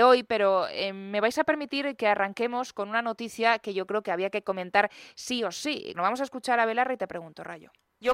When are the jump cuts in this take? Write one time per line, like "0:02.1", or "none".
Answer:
0:05.9